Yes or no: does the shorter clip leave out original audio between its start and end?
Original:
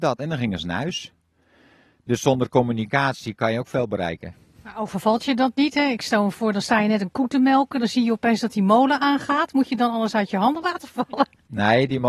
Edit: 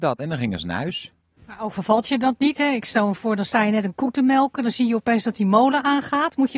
yes